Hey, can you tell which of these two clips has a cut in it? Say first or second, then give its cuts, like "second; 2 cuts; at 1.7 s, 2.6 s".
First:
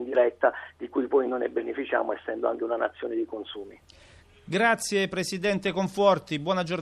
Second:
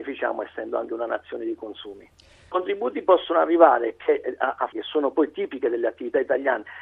second; 2 cuts; at 2.5 s, 4.7 s